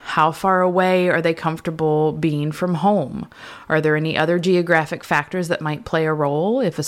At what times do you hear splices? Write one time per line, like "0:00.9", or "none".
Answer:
none